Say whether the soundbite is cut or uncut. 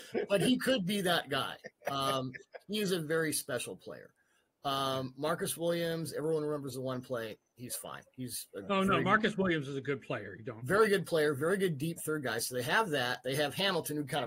uncut